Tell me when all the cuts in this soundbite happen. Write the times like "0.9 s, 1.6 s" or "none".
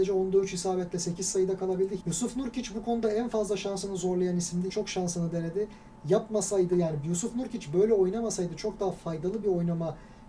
2.0 s, 4.7 s